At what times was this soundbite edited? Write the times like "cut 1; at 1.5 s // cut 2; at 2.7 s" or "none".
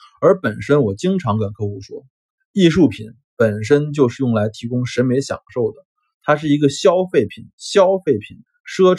none